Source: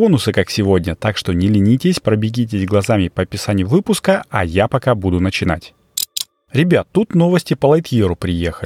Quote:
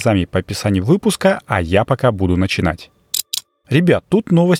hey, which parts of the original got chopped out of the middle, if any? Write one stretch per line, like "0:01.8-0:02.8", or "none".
none